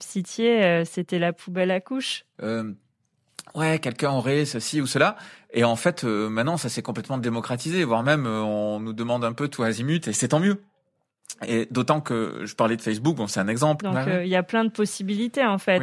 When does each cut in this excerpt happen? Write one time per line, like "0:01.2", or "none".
0:02.3
0:13.8

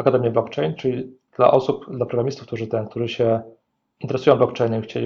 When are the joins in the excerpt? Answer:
none

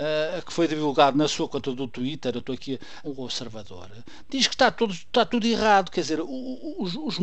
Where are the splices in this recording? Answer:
0:03.0

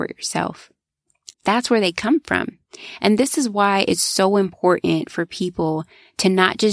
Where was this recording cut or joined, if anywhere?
0:01.3

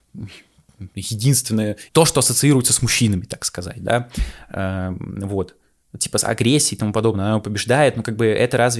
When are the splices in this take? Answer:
0:01.9

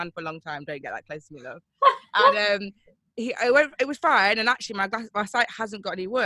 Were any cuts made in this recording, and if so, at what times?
none

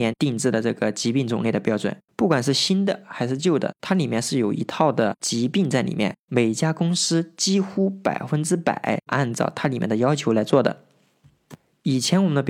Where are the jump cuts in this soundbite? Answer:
0:02.1

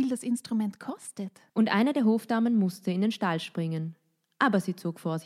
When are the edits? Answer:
0:01.5

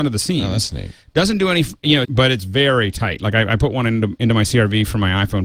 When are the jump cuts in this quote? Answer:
0:02.0

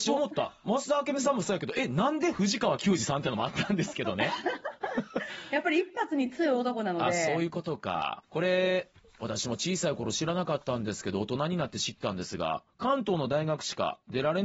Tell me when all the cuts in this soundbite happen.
0:08.2

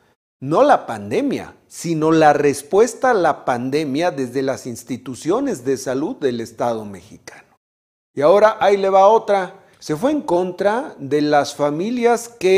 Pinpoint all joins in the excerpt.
0:09.7

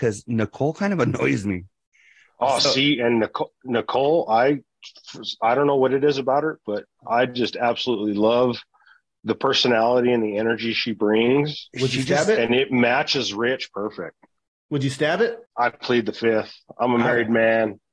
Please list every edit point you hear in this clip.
none

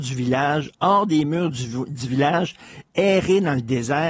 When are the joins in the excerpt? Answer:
none

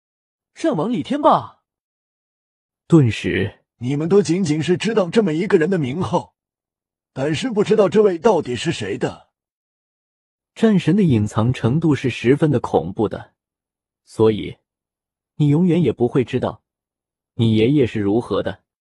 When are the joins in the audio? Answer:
0:03.7

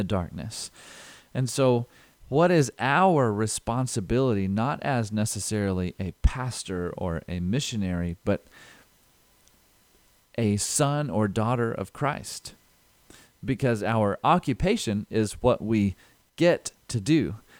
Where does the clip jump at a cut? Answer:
none

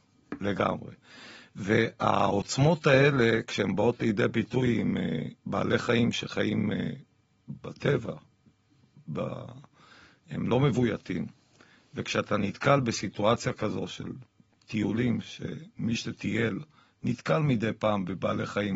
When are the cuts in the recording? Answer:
none

